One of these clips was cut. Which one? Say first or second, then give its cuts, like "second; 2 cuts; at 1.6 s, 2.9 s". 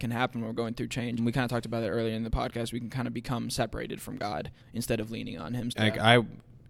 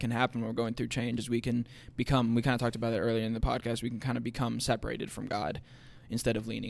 first; 3 cuts; at 1.2 s, 4.6 s, 5.7 s